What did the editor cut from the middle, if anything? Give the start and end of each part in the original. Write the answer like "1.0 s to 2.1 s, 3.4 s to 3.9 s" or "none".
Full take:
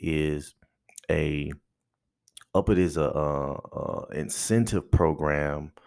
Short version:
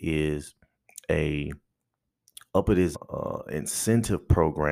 2.9 s to 3.6 s